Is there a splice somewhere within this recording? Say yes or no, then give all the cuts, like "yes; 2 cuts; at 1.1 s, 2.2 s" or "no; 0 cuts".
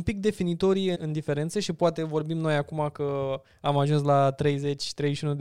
yes; 1 cut; at 0.9 s